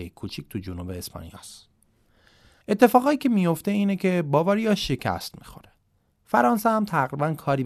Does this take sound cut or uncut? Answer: cut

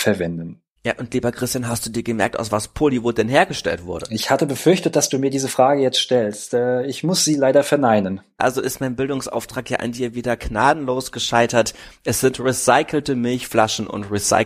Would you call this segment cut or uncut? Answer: uncut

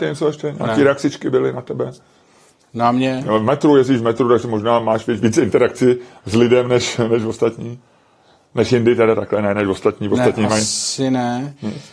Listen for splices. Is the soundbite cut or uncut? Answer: uncut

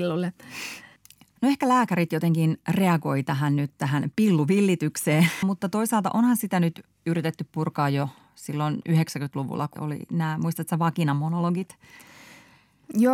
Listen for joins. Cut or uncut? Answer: cut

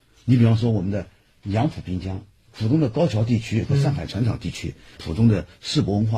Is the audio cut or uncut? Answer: uncut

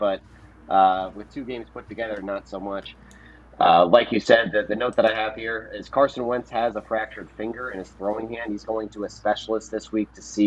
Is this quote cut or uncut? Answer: uncut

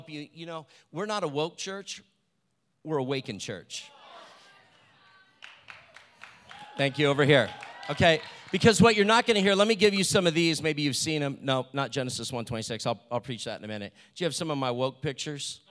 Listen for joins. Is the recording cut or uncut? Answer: uncut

